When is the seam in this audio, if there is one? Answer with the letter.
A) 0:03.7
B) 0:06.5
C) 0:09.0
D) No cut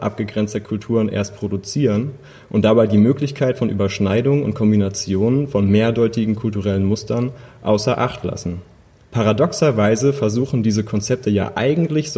C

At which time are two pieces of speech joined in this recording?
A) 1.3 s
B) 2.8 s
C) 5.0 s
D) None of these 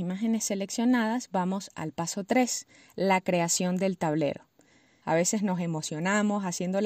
C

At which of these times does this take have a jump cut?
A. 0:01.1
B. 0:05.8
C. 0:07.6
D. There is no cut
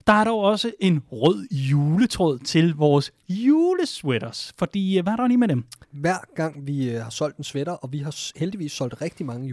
B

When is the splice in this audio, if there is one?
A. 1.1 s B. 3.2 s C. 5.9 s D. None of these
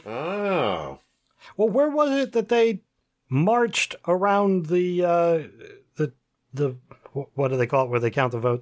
D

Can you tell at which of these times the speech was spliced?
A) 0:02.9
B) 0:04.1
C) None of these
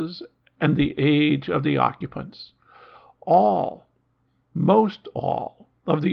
C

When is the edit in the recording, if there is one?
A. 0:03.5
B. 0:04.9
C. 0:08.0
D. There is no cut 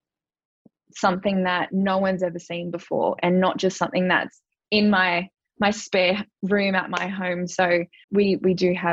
C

